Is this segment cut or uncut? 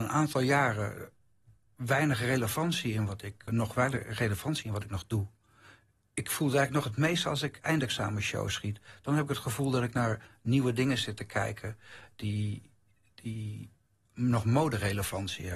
cut